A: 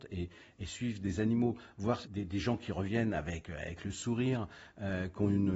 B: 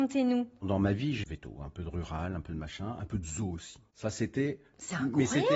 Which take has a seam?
B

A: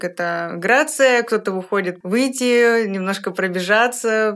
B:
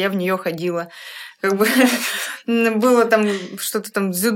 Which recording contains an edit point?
A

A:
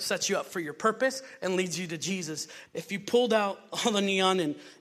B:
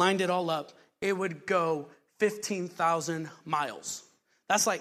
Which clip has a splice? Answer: A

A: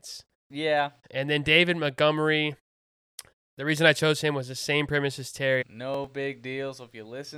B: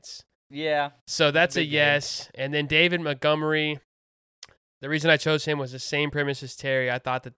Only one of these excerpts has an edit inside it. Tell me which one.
A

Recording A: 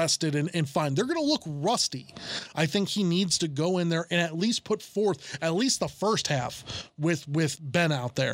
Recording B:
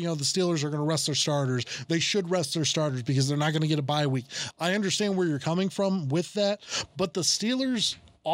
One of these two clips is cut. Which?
A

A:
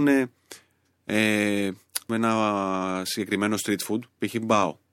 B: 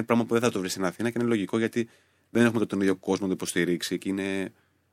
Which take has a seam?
A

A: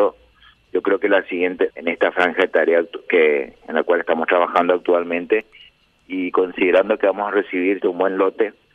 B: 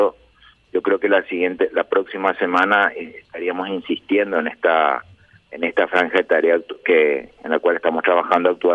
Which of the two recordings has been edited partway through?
A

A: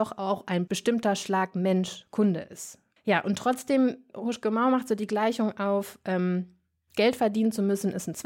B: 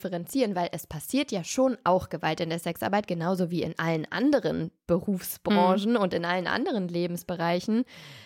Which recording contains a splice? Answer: A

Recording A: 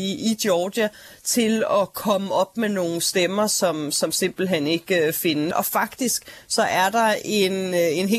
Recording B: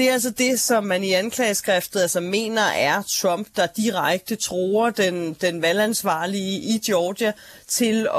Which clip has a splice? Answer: A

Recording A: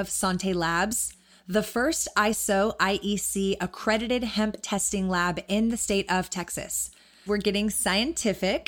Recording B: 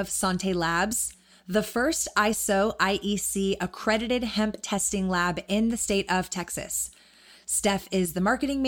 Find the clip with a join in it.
A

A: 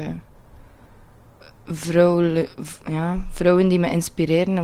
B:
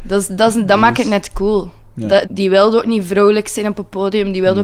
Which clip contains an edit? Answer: B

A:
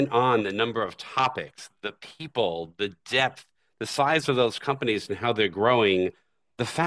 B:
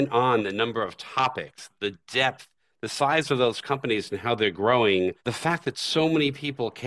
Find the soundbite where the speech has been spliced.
B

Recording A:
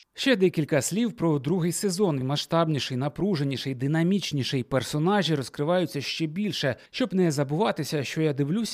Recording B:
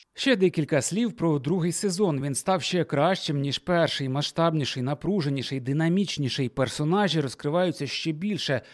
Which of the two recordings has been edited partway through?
A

